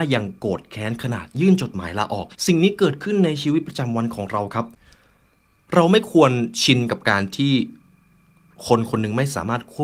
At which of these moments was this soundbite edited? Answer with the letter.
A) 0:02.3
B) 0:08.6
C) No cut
A